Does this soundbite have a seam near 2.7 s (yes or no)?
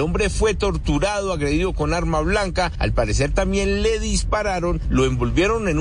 no